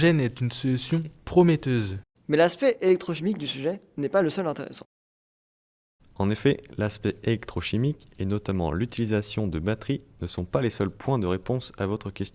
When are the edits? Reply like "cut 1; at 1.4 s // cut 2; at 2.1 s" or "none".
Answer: cut 1; at 2.2 s // cut 2; at 6.0 s

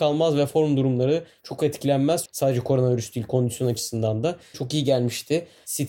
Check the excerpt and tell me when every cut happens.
cut 1; at 2.3 s // cut 2; at 4.5 s

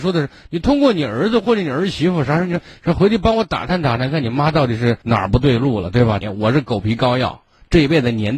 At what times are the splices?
cut 1; at 5.0 s // cut 2; at 6.2 s

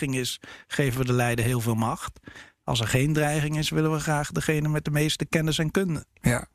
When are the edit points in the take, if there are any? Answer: none

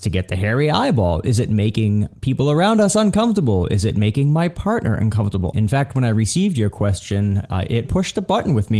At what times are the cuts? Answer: cut 1; at 5.5 s // cut 2; at 7.8 s

